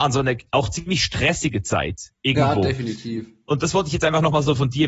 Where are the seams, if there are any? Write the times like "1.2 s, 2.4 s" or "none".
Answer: none